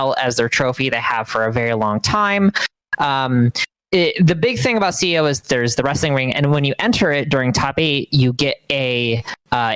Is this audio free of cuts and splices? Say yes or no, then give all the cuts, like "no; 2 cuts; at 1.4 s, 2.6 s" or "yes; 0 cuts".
yes; 0 cuts